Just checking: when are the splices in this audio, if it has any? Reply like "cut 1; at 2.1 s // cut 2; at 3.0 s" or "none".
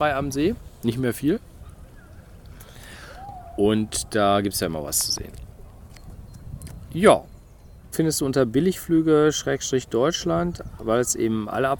cut 1; at 7.9 s